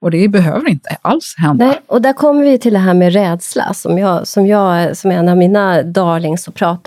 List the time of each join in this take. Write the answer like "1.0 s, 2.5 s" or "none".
none